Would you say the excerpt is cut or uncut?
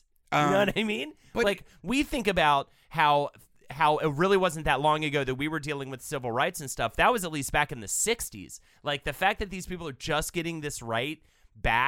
uncut